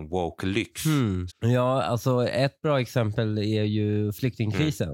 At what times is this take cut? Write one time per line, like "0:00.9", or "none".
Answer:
0:01.3